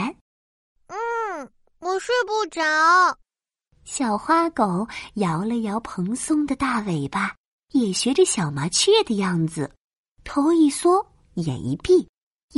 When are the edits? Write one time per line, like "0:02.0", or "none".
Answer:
0:03.7
0:10.1